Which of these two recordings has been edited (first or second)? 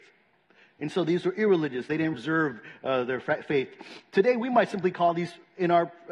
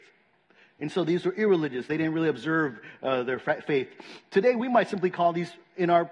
first